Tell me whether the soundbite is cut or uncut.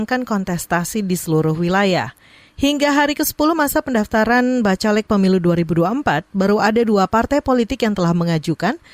uncut